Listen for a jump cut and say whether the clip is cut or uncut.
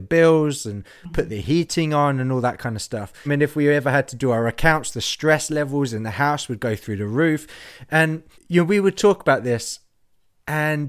cut